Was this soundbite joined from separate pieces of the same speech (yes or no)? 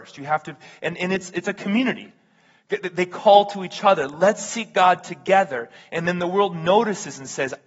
no